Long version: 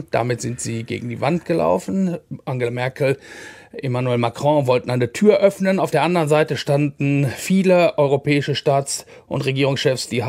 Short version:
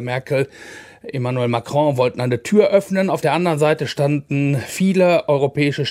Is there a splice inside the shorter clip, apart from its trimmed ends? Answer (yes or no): no